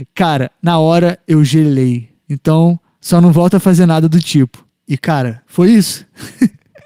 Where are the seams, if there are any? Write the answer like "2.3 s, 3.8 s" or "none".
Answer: 2.2 s